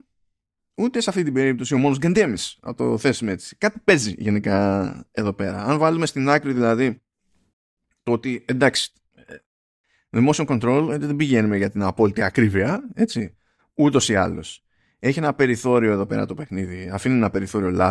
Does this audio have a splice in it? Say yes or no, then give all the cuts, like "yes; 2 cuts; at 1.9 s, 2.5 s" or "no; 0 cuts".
no; 0 cuts